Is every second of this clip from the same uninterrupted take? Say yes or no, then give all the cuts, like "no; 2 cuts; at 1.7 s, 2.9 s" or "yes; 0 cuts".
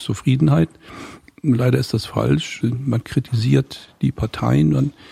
no; 1 cut; at 2.6 s